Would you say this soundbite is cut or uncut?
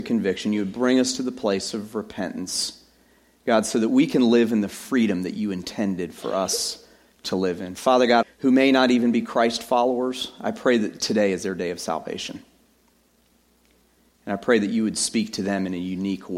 cut